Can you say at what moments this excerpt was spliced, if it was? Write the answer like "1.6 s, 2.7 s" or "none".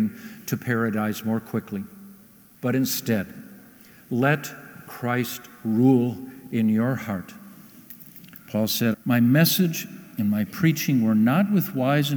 2.6 s, 8.9 s